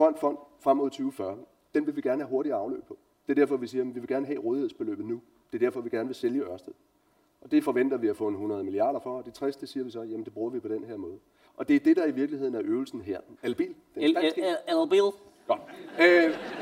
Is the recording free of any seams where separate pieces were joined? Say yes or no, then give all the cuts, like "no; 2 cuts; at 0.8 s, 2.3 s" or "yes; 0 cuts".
no; 2 cuts; at 11.4 s, 13.4 s